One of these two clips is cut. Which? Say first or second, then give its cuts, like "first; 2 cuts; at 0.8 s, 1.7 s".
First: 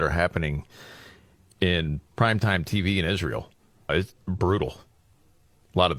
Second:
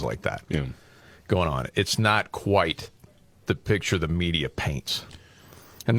first; 1 cut; at 3.9 s